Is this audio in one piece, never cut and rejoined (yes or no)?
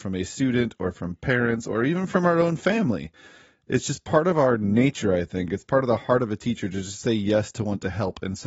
yes